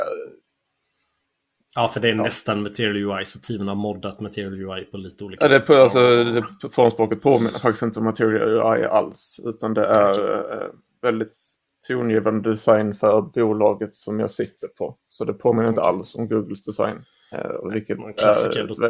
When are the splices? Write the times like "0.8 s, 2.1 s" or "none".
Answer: none